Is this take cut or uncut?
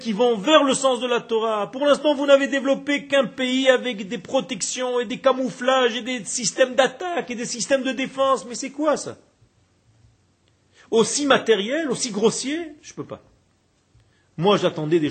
uncut